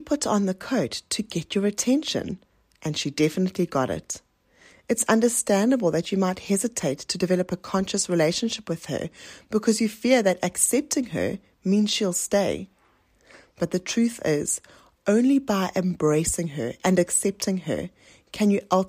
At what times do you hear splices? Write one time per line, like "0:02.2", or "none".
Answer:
none

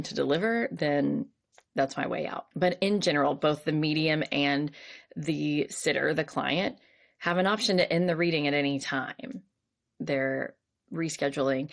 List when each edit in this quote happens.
0:02.5
0:09.9

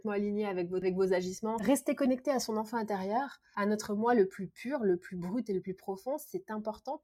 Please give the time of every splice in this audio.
none

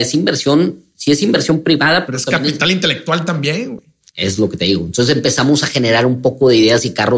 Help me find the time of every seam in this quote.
none

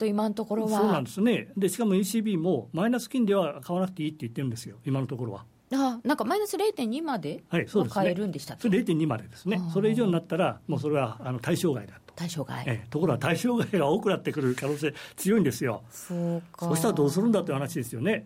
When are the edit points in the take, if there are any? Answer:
none

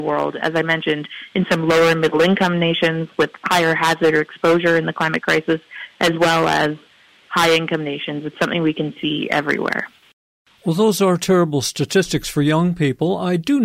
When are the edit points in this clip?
none

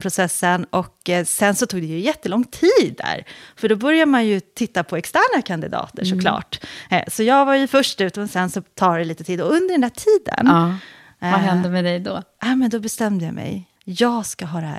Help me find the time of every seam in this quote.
0:13.8

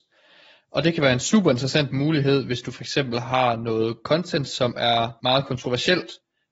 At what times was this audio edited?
none

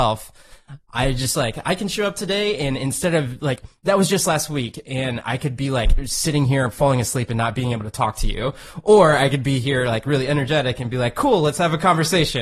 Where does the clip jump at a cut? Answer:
none

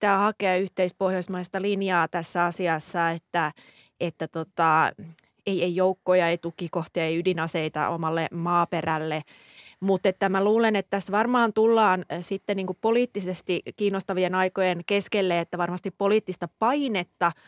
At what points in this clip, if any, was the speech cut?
none

